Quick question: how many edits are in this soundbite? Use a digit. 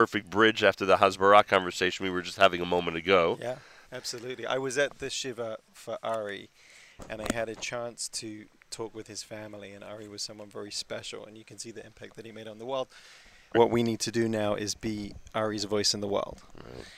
2